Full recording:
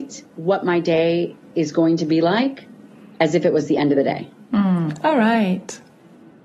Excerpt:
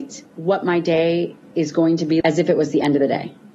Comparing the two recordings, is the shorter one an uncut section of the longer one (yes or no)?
no